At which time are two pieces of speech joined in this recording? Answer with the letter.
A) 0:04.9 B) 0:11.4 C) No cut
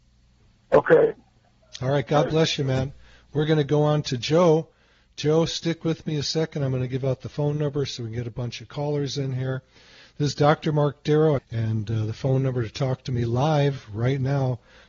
B